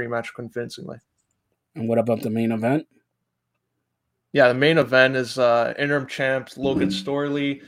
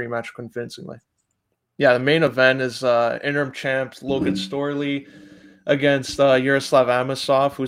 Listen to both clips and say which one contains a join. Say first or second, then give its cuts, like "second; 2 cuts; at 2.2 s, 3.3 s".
second; 1 cut; at 1.6 s